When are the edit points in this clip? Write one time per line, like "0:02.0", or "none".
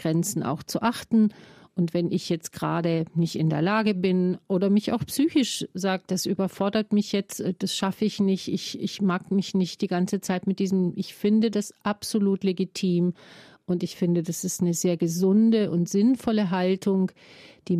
none